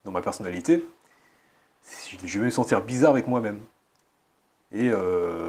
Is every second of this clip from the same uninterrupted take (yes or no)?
yes